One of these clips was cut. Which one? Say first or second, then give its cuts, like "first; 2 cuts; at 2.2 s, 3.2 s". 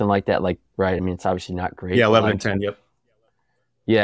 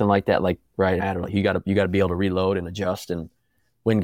second; 1 cut; at 1.0 s